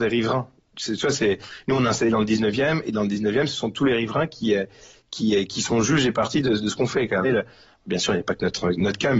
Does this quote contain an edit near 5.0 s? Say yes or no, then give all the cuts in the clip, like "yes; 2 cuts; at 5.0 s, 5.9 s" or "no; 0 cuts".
no; 1 cut; at 7.2 s